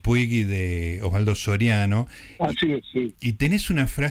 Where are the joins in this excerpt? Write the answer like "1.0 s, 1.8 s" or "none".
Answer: none